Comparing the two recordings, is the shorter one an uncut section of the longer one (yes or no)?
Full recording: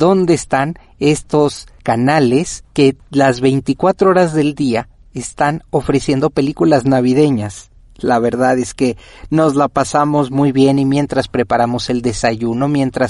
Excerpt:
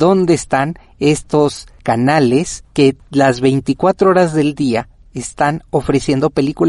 yes